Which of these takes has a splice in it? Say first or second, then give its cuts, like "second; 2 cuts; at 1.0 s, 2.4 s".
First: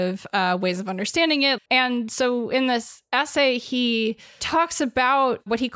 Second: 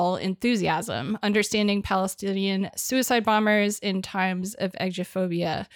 first; 1 cut; at 1.6 s